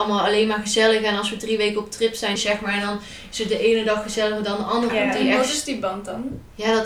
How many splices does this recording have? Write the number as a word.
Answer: two